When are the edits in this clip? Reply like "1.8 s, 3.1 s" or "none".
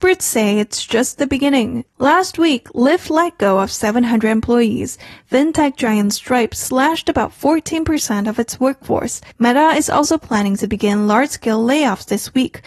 1.9 s, 9.3 s

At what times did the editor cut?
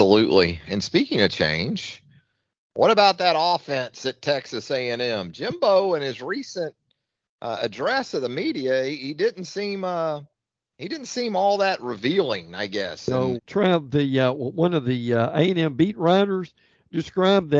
13.4 s

